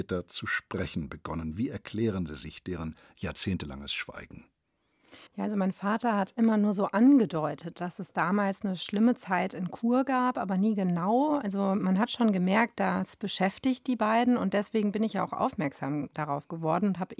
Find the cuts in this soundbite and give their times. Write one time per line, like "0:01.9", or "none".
0:05.3